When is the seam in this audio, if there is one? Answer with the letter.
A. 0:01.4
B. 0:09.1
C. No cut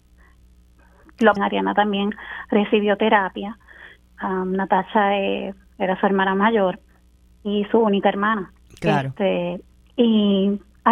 A